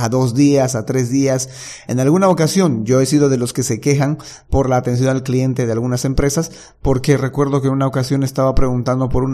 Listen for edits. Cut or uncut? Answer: uncut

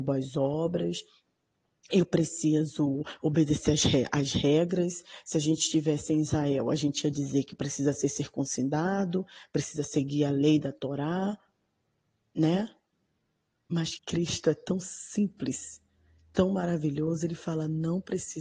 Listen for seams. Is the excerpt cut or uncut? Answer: cut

